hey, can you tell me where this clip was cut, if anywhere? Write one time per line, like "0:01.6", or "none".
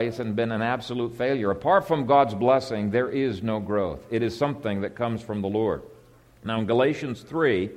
none